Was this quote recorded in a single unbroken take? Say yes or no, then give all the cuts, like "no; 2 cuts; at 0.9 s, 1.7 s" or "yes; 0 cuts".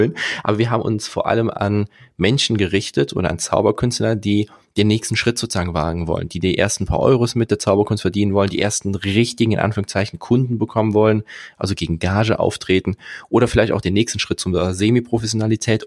yes; 0 cuts